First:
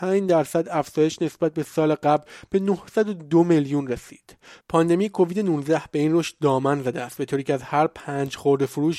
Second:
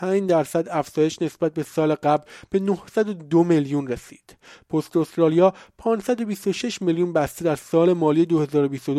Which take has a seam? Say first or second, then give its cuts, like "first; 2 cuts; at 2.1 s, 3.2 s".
first; 1 cut; at 4.6 s